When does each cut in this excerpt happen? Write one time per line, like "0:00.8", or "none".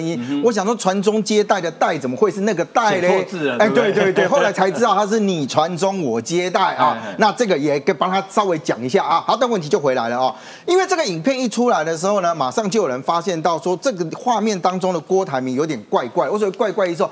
none